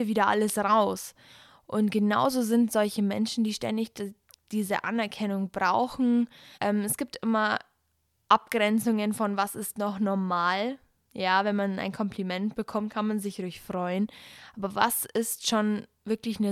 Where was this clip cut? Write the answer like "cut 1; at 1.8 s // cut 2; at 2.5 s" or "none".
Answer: cut 1; at 6.5 s